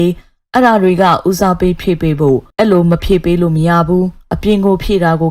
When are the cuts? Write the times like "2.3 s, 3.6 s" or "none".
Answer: 2.5 s

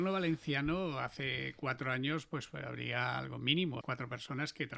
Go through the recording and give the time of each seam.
3.8 s

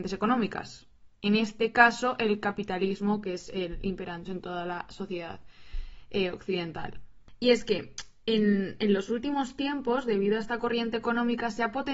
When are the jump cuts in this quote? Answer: 4.3 s

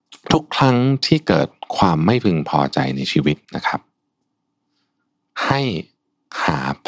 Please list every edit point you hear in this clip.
3.5 s

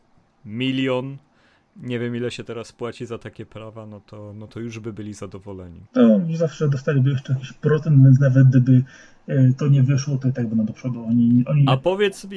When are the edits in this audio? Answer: 5.9 s

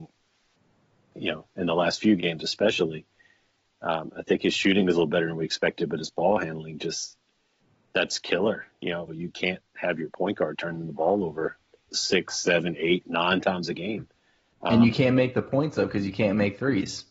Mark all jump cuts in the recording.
9.1 s

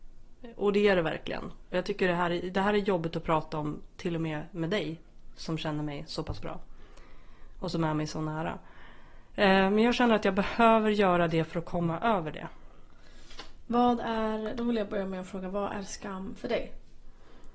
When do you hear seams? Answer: none

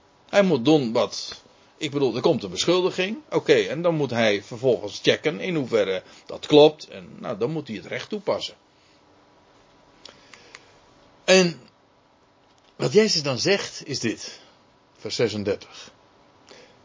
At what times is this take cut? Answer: none

